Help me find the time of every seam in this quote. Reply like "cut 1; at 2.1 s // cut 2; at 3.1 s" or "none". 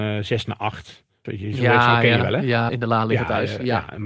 cut 1; at 1.3 s // cut 2; at 2.7 s